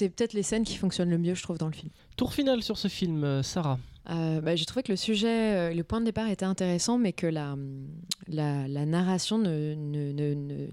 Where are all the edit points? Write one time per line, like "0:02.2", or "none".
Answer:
0:04.0